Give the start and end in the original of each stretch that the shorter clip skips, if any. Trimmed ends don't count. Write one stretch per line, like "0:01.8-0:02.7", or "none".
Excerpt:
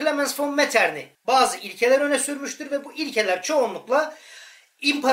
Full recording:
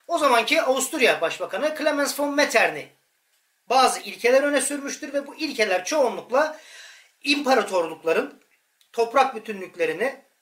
0:02.9-0:03.6